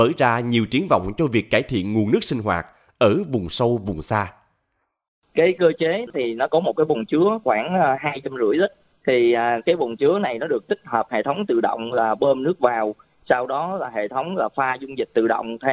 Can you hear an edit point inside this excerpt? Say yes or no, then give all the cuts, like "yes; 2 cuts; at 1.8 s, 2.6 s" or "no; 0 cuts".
yes; 1 cut; at 6.1 s